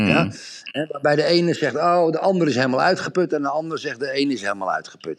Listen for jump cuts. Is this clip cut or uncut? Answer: uncut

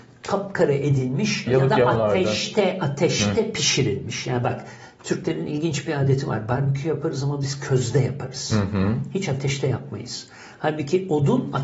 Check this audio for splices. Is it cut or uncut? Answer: cut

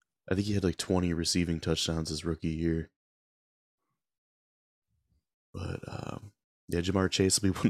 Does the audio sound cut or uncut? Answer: uncut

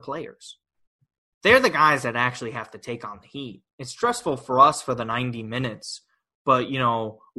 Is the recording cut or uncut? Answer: uncut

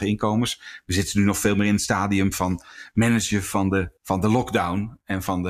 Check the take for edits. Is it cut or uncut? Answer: cut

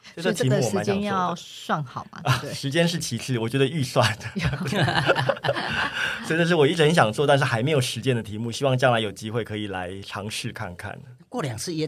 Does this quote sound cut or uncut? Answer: uncut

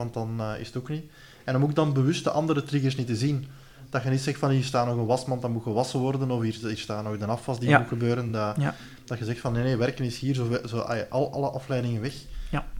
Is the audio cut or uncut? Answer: uncut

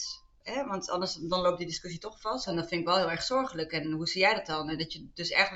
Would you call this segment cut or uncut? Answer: cut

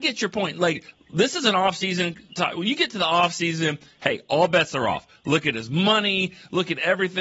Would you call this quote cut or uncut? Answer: uncut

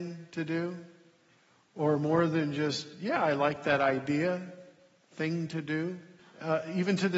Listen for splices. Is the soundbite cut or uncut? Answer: cut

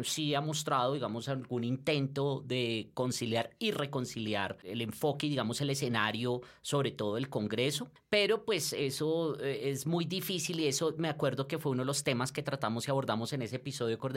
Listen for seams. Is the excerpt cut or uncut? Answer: uncut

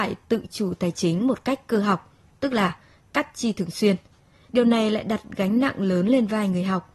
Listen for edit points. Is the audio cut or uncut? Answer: cut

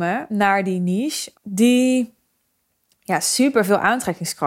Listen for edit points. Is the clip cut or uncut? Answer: cut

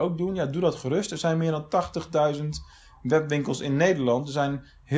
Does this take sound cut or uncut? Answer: uncut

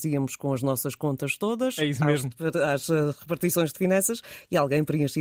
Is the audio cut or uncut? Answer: uncut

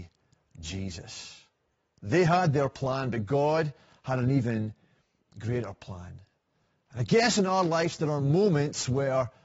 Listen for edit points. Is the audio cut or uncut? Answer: uncut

